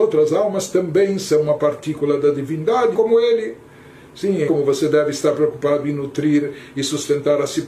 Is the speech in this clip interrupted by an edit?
yes; 2 cuts; at 2.9 s, 4.5 s

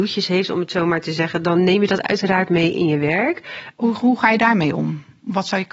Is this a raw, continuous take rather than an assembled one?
no; 1 cut; at 3.7 s

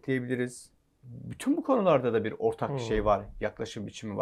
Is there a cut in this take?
no; 0 cuts

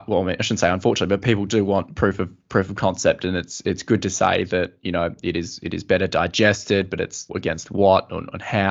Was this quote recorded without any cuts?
no; 1 cut; at 7.3 s

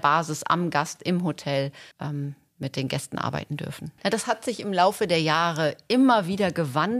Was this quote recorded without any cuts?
no; 2 cuts; at 1.9 s, 4.0 s

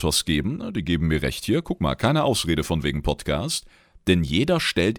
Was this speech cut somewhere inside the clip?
no; 0 cuts

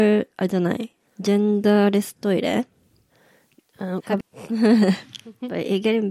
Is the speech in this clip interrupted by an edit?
yes; 1 cut; at 4.2 s

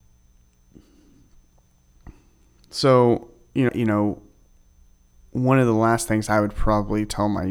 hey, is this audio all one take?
no; 1 cut; at 3.7 s

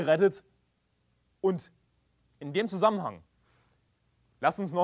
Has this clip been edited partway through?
yes; 1 cut; at 1.4 s

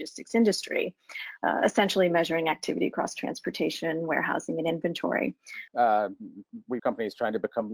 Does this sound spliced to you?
yes; 2 cuts; at 5.7 s, 6.8 s

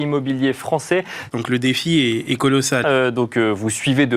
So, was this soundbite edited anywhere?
yes; 2 cuts; at 1.3 s, 2.8 s

